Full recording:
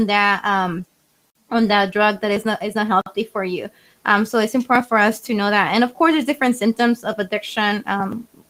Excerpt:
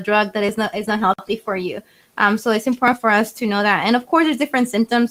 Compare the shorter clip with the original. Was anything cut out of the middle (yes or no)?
no